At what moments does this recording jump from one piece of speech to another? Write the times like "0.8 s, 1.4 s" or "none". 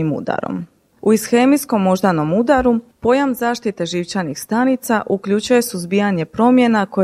0.9 s